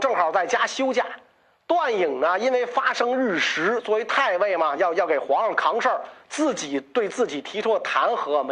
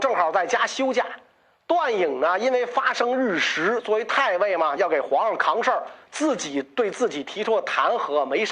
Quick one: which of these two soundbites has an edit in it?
second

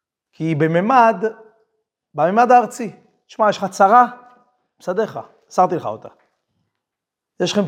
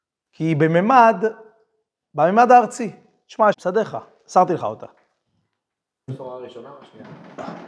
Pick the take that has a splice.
second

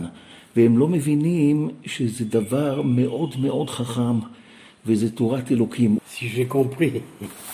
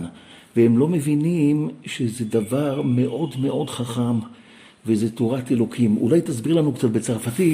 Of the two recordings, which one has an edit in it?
first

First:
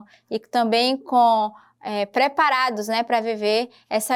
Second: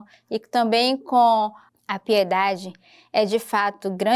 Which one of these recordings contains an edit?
second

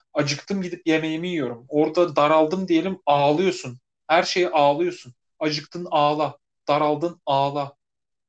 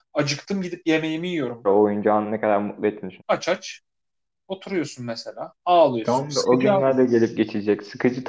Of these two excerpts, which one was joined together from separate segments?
second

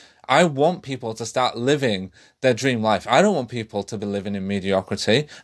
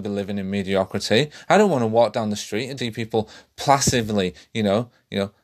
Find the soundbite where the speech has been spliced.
second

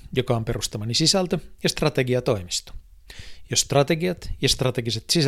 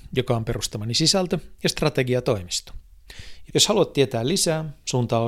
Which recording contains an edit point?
second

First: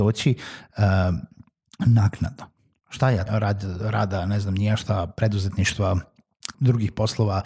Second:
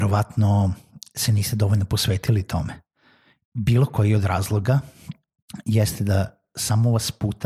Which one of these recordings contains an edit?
first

